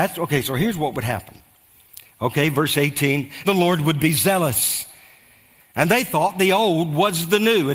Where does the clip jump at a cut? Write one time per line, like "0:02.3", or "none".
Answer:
0:03.4
0:05.6